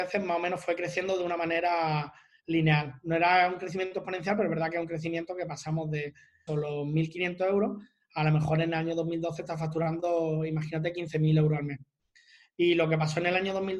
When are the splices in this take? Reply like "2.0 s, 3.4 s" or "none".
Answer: 6.5 s